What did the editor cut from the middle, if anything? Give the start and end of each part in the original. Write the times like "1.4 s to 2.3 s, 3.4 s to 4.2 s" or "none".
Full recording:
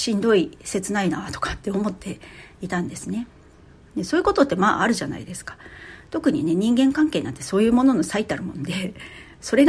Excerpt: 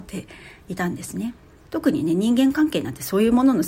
3.6 s to 6.0 s